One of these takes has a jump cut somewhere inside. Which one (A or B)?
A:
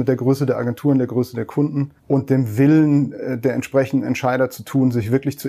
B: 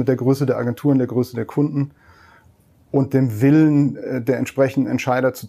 A